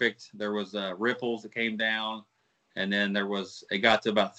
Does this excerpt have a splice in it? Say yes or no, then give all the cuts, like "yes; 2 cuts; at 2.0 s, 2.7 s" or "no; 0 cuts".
no; 0 cuts